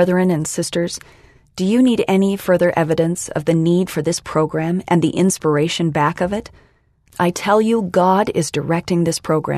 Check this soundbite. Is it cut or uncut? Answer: uncut